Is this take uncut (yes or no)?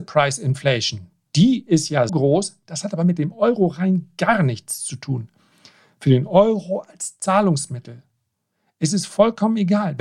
no